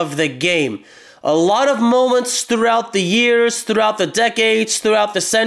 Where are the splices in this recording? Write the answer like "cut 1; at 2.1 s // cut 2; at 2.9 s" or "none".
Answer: none